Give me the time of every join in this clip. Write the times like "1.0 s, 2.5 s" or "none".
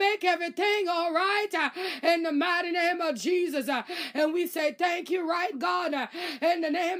5.5 s